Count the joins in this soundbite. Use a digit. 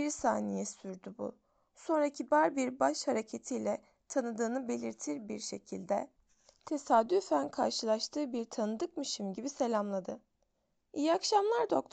0